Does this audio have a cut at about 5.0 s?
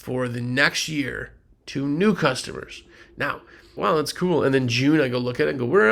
no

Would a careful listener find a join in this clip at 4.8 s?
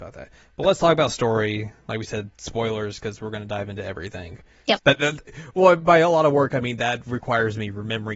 yes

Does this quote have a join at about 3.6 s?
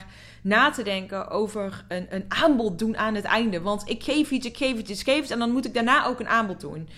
no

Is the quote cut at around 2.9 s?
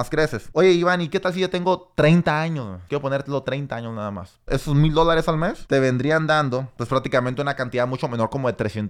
yes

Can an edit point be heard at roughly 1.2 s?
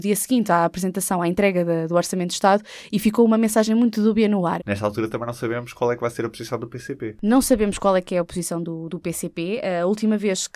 no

